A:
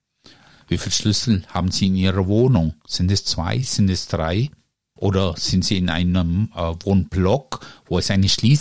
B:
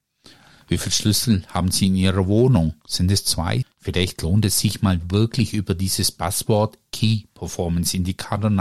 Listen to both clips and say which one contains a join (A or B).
B